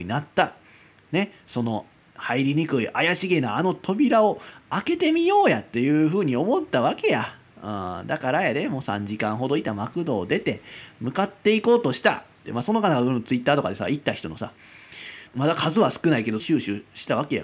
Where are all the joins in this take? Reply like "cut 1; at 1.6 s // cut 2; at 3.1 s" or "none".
cut 1; at 12.4 s // cut 2; at 15.3 s // cut 3; at 16.4 s